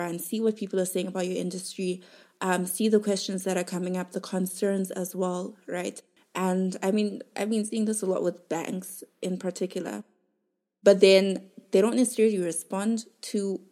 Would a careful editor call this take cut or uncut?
cut